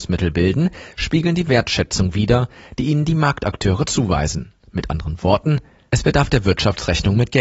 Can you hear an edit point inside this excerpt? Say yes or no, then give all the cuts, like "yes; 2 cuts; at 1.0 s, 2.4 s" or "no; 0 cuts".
no; 0 cuts